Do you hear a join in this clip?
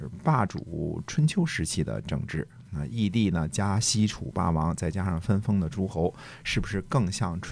no; 0 cuts

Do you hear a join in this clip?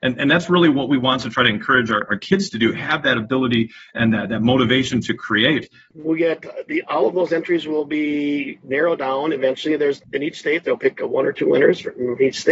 yes; 1 cut; at 5.9 s

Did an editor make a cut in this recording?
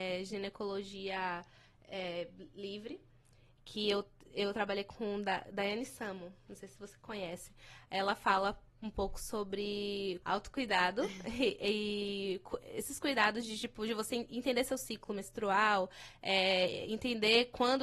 no; 0 cuts

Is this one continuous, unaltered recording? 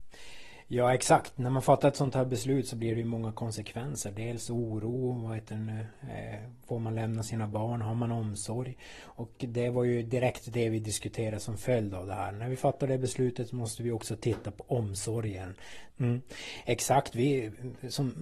no; 1 cut; at 15.9 s

